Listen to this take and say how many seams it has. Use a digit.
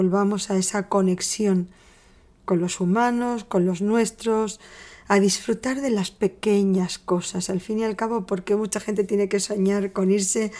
0